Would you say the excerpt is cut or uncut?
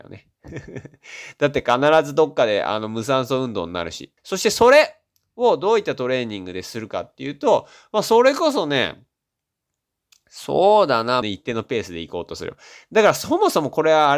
cut